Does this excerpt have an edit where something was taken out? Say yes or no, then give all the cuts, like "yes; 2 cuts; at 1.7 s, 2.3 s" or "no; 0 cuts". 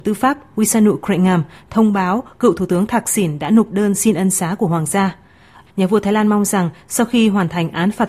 yes; 1 cut; at 5.7 s